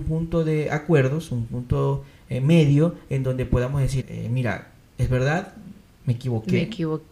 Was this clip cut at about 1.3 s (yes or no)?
no